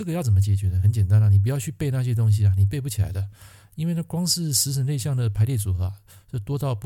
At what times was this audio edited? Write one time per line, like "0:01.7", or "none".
none